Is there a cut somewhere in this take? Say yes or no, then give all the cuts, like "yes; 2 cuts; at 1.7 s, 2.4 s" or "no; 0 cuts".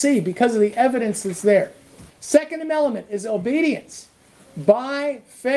yes; 1 cut; at 2.1 s